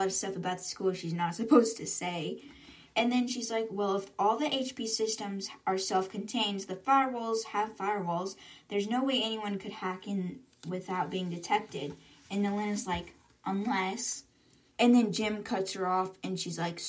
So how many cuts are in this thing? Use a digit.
1